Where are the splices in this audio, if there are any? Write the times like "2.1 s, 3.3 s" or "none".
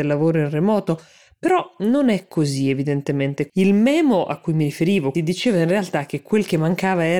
3.5 s, 5.1 s